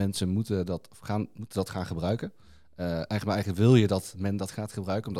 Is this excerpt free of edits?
yes; 0 cuts

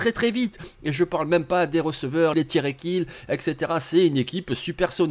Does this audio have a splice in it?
yes; 1 cut; at 2.3 s

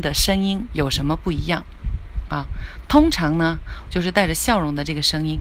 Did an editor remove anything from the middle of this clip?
yes; 1 cut; at 3.9 s

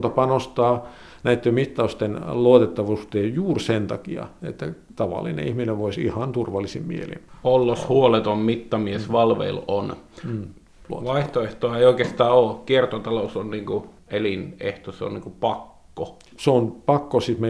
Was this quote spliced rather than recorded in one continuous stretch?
no; 0 cuts

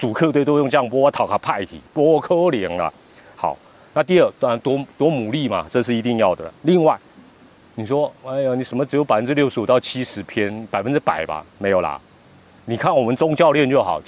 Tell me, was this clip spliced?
no; 0 cuts

